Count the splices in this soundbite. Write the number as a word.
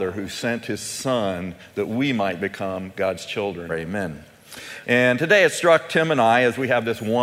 two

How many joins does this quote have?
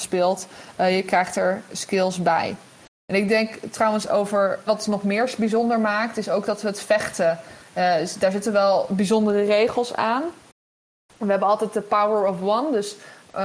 one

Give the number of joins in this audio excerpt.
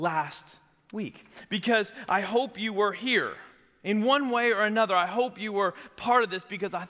zero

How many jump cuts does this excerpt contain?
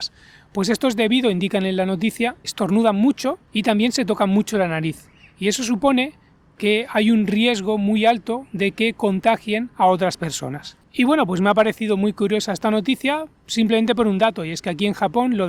one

